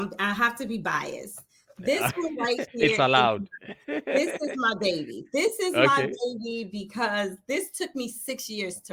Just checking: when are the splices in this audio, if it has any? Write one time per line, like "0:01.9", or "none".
none